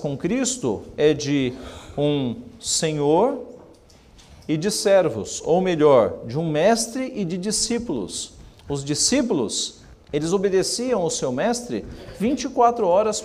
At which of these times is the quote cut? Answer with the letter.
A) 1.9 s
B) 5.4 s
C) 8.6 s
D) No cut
D